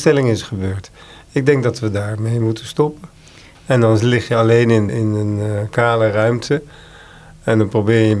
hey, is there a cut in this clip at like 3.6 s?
yes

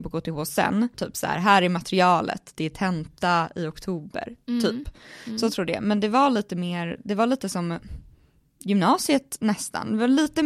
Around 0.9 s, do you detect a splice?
yes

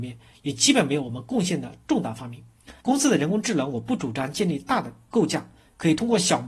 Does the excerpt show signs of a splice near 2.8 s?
yes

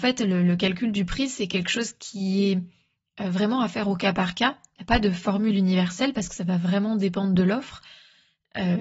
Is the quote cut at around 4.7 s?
no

